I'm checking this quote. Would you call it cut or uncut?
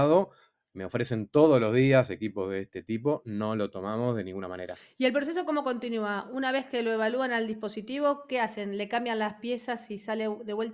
uncut